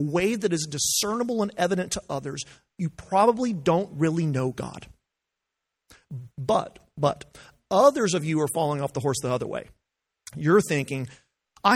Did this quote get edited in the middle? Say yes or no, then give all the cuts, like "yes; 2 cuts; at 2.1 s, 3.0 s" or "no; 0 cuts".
yes; 1 cut; at 6.3 s